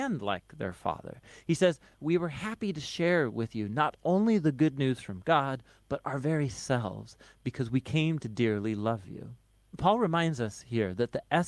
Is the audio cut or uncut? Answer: uncut